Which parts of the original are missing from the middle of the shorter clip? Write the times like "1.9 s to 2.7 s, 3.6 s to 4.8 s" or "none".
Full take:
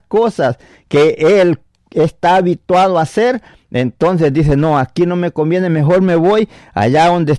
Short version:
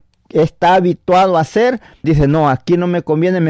3.7 s to 4.3 s